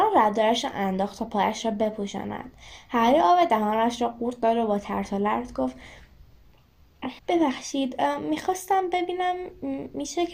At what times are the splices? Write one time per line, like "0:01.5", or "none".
0:07.2